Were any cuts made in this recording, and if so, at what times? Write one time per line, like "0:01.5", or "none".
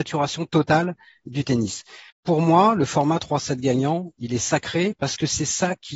0:02.1